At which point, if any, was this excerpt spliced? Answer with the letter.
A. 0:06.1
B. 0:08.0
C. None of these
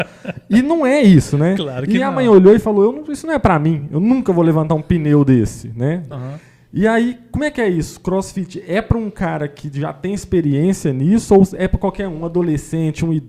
A